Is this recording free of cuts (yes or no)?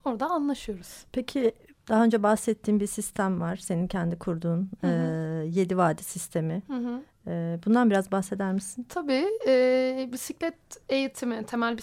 yes